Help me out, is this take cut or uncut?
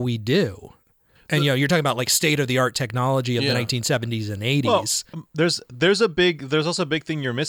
uncut